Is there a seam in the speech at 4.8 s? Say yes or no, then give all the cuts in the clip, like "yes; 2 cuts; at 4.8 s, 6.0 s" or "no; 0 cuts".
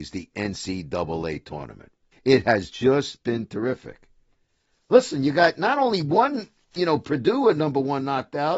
no; 1 cut; at 2.1 s